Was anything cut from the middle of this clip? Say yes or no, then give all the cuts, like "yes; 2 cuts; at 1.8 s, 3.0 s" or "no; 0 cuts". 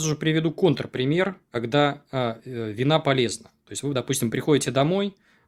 no; 0 cuts